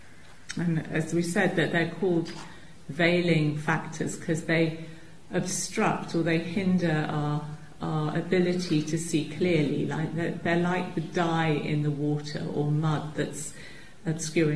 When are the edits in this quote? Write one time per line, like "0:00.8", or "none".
none